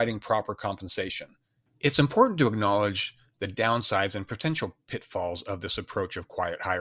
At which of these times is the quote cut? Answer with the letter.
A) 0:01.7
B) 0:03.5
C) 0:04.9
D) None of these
A